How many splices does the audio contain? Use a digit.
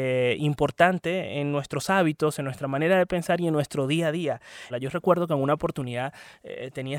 1